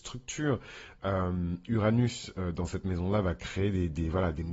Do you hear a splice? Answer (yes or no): yes